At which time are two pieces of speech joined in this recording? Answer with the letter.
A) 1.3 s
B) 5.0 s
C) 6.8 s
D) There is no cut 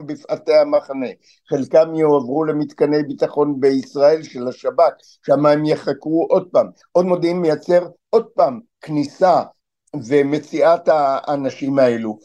C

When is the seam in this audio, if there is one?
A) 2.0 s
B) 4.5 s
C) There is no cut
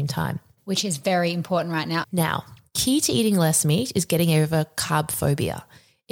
A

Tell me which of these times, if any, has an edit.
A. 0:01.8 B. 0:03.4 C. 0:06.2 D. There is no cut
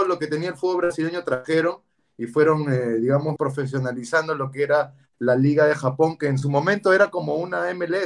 B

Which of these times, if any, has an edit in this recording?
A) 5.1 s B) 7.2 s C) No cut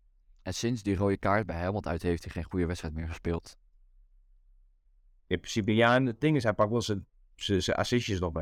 C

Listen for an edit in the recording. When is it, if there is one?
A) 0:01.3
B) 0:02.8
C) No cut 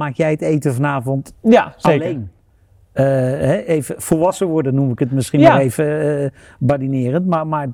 A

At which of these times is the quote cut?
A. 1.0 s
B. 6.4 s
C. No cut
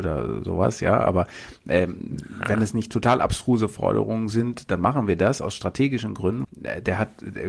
B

